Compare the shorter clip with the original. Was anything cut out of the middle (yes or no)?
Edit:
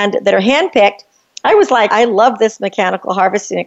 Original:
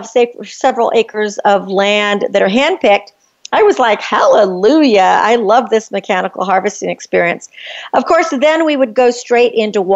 yes